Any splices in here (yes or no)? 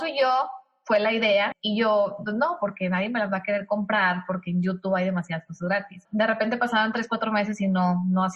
yes